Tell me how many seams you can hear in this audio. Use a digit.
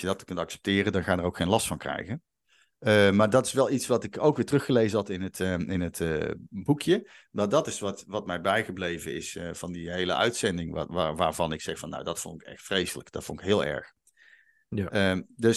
0